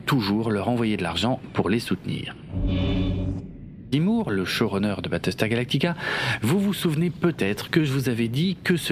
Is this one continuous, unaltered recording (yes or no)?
no